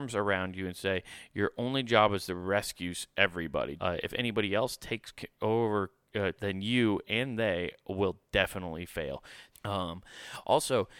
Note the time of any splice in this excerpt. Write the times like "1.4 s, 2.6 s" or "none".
3.8 s, 6.4 s, 9.5 s